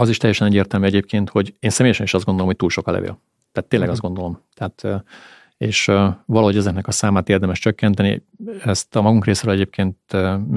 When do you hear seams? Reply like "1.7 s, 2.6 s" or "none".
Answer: none